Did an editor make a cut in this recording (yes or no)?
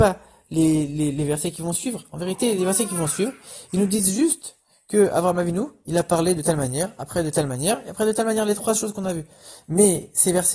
no